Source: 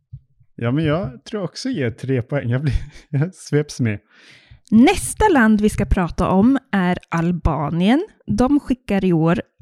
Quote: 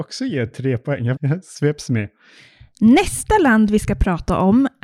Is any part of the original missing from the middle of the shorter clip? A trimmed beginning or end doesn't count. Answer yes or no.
yes